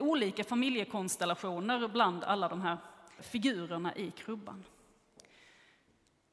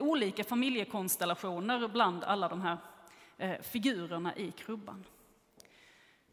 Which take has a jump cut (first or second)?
first